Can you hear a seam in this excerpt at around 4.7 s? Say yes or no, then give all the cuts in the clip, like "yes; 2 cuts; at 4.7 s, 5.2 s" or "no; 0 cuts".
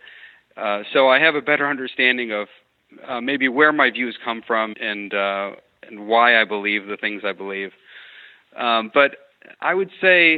yes; 1 cut; at 4.7 s